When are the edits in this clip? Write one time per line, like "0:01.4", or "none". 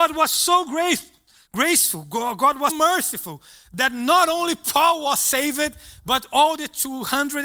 0:02.7